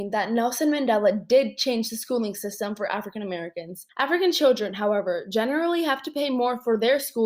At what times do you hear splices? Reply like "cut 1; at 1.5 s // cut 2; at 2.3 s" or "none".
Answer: cut 1; at 3.9 s